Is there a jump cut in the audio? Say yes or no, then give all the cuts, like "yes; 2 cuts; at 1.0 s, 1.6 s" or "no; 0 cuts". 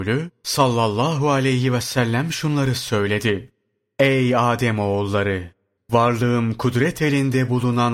yes; 1 cut; at 5.8 s